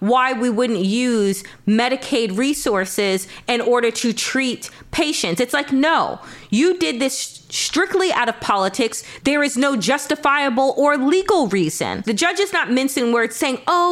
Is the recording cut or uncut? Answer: cut